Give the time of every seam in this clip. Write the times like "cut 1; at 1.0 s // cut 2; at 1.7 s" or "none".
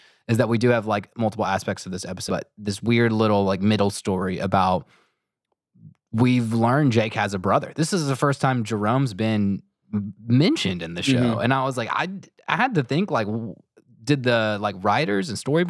cut 1; at 2.3 s